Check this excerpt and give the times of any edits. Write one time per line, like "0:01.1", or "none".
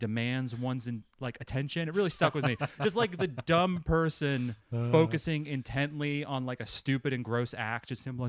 none